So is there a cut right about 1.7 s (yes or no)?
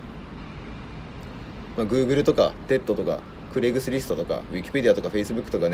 yes